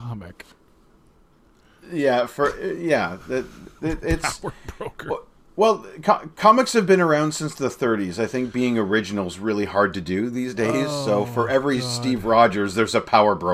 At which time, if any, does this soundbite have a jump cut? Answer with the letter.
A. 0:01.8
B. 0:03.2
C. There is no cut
C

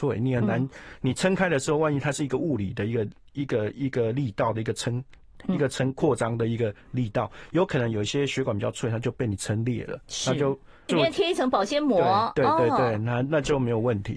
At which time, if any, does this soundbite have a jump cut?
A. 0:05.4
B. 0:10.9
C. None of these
B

